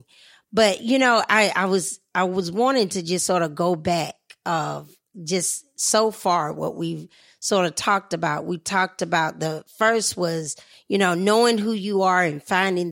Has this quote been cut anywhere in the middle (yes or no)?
no